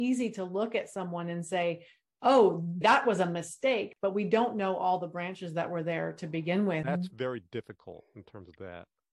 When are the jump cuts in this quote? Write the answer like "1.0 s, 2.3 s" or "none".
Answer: 2.8 s, 6.8 s